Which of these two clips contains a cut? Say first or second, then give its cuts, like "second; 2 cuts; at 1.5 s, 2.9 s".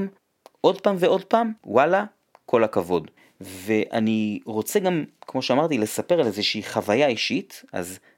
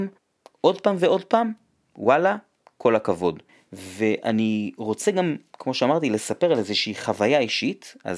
first; 1 cut; at 1.6 s